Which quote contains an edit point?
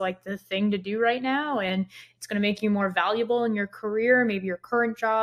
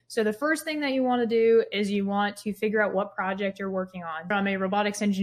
second; 1 cut; at 4.3 s

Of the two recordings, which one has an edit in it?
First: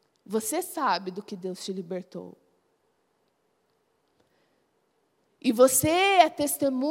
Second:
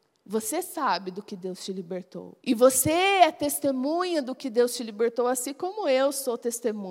second; 1 cut; at 2.4 s

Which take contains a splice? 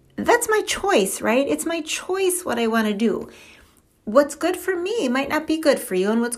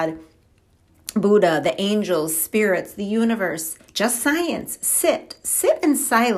second; 1 cut; at 3.9 s

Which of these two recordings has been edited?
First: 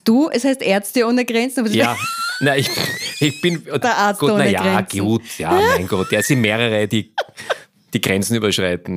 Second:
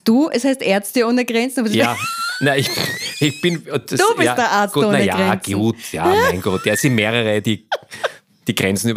first; 1 cut; at 3.8 s

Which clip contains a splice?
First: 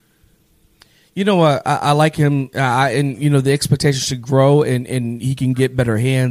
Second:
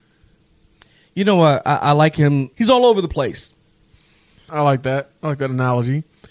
second; 2 cuts; at 2.5 s, 4.5 s

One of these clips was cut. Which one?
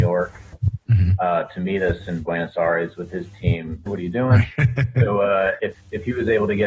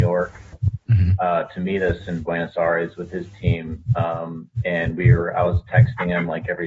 first; 2 cuts; at 3.9 s, 5.6 s

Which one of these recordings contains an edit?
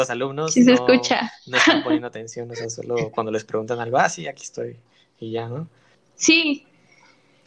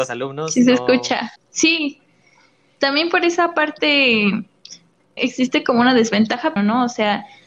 second; 3 cuts; at 1.4 s, 5.2 s, 6.6 s

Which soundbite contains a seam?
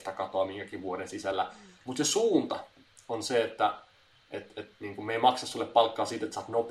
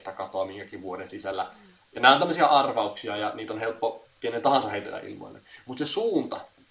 first; 1 cut; at 1.8 s

